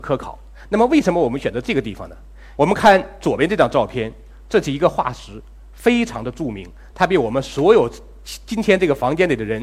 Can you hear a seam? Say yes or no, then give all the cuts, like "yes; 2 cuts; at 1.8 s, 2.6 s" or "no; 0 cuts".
yes; 2 cuts; at 2.6 s, 6.9 s